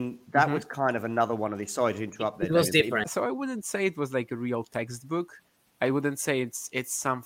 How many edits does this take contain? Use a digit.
1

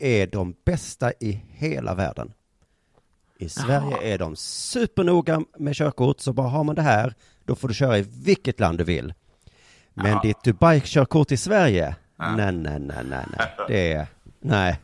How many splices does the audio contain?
0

